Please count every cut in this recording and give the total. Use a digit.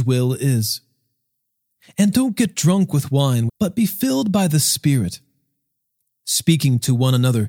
1